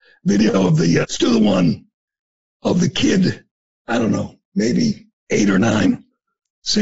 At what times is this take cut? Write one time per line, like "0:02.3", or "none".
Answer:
0:01.0